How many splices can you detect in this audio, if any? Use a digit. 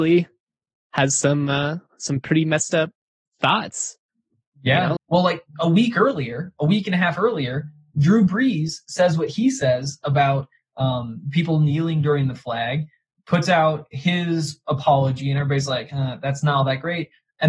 1